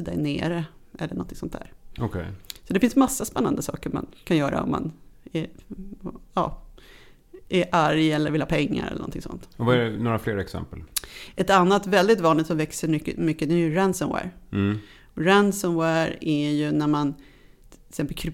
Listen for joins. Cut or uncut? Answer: uncut